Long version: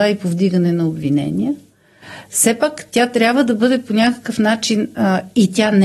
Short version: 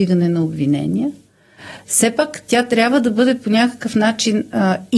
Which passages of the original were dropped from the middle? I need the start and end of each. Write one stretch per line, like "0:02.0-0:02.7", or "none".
none